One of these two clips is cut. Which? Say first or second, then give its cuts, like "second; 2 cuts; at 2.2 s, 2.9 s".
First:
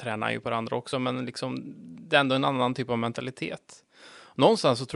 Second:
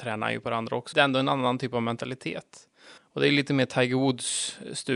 second; 2 cuts; at 0.9 s, 3.0 s